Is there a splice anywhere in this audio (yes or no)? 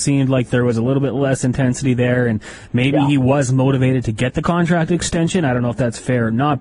no